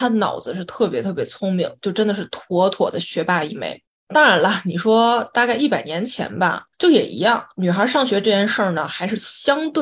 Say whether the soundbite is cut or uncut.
cut